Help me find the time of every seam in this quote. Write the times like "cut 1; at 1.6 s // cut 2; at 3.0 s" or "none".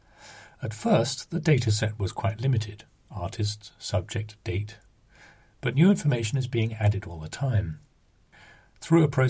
none